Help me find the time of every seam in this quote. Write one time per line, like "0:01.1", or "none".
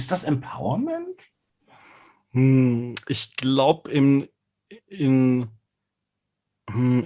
none

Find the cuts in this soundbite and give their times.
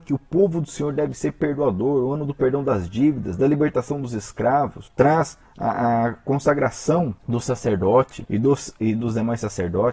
0:04.9

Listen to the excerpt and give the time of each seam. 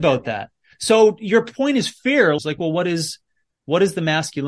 0:02.4

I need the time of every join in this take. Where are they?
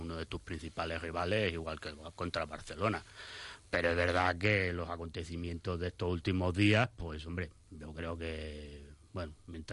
none

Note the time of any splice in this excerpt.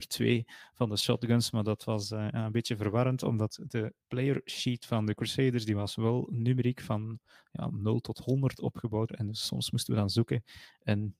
0:04.0
0:09.1

